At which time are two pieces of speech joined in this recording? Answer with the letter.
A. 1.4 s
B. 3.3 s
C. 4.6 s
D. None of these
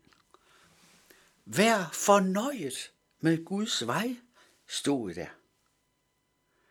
D